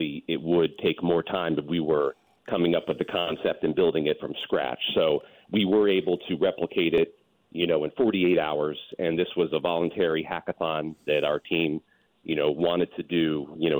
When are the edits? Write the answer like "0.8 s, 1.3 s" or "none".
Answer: none